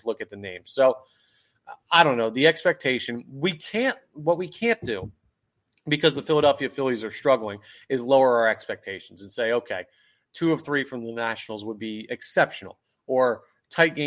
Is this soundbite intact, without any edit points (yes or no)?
yes